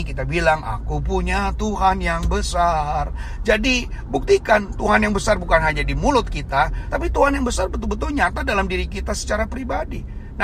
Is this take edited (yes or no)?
yes